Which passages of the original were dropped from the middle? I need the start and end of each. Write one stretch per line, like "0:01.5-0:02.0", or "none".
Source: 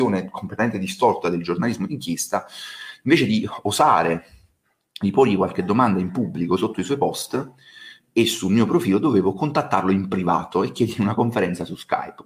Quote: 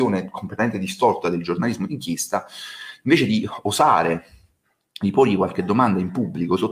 none